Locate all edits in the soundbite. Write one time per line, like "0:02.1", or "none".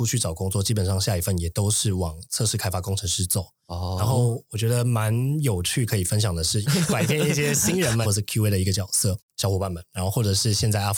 0:06.6
0:08.0
0:09.3